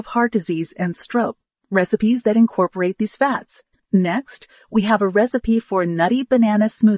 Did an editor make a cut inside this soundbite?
yes; 2 cuts; at 1.6 s, 3.8 s

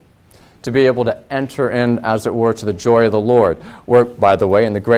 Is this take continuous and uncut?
yes; 0 cuts

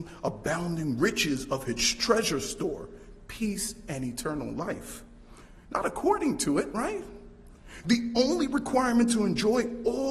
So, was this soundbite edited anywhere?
yes; 1 cut; at 5.6 s

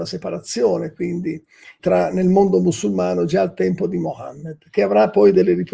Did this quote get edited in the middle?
yes; 1 cut; at 1.8 s

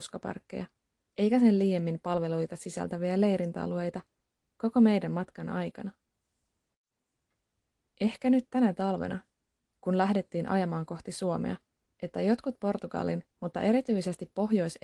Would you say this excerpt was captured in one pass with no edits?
no; 2 cuts; at 11.8 s, 13.3 s

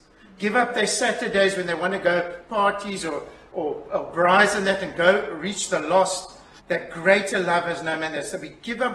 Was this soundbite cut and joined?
yes; 1 cut; at 6.6 s

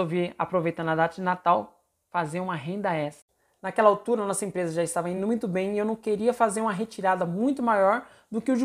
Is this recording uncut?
yes; 0 cuts

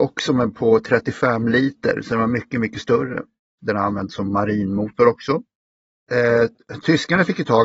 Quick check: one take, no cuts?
no; 1 cut; at 3.6 s

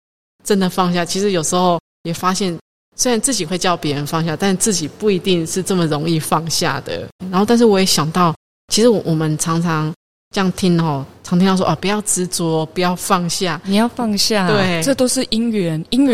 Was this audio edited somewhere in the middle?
yes; 1 cut; at 7.2 s

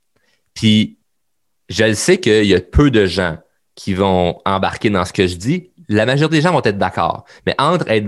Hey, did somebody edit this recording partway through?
no; 0 cuts

